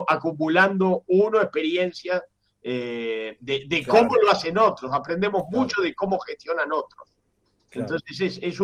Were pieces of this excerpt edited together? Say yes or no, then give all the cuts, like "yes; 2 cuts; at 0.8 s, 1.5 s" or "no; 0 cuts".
no; 0 cuts